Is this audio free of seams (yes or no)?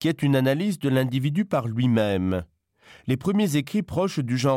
yes